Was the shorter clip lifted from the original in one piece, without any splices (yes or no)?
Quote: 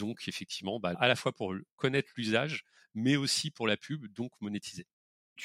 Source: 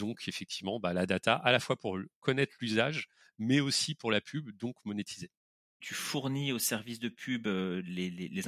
no